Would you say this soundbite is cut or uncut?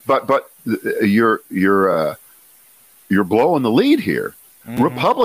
uncut